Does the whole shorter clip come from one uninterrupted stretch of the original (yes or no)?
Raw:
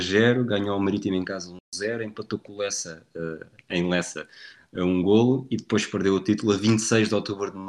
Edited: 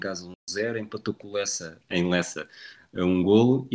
no